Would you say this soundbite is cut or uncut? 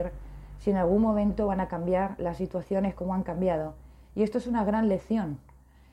uncut